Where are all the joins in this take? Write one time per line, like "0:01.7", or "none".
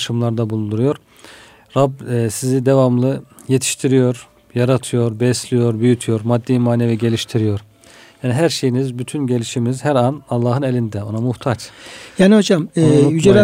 none